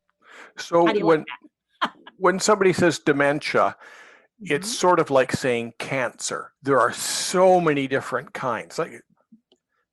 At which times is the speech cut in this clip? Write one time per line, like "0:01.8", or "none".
0:06.6

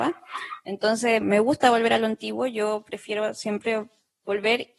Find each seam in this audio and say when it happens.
0:01.2

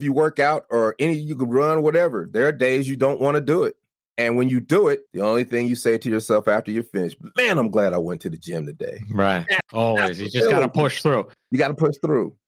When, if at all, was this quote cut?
0:09.6

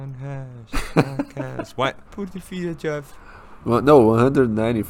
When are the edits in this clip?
0:02.0
0:03.6

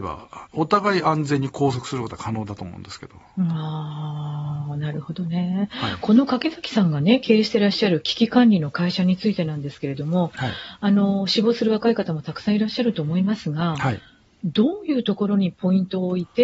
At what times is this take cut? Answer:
none

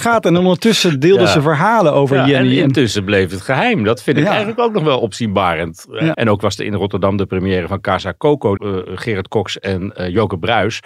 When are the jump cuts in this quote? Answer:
0:06.1
0:08.6

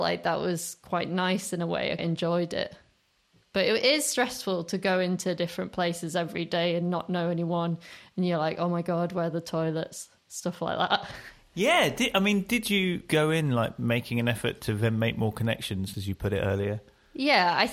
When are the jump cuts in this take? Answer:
0:02.0
0:15.9

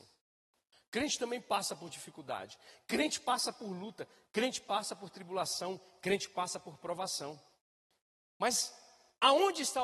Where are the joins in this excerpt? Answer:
none

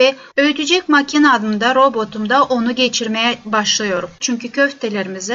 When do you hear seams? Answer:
0:04.2

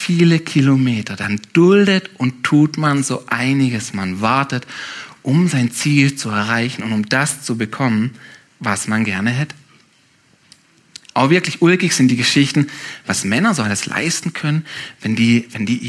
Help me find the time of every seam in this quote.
none

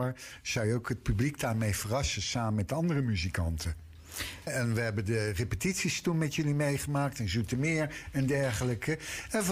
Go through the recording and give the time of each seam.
0:04.5

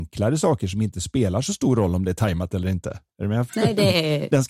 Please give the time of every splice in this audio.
0:03.5

